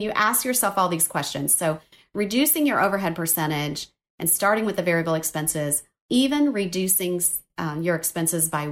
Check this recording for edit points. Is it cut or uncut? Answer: cut